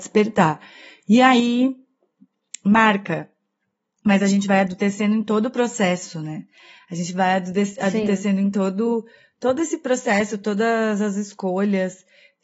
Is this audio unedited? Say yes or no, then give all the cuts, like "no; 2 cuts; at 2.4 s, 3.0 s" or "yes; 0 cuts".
yes; 0 cuts